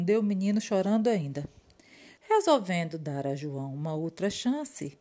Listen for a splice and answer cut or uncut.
cut